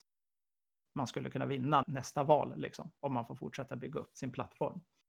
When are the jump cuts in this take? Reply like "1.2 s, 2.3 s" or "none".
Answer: 1.8 s